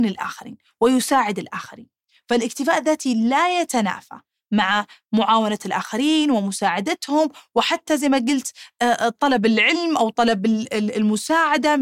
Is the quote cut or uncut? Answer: cut